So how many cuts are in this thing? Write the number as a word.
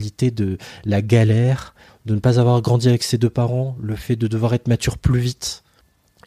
one